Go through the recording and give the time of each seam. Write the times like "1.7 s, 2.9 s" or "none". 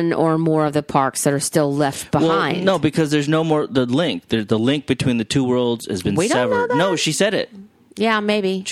none